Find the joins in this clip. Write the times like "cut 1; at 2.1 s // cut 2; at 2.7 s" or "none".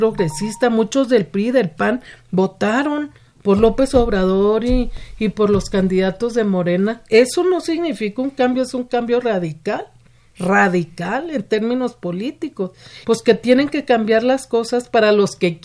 cut 1; at 13.0 s